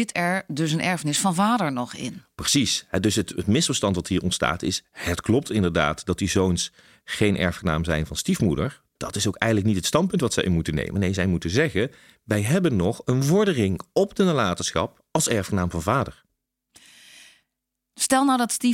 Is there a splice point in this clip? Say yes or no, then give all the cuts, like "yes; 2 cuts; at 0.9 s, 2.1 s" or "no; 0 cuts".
no; 0 cuts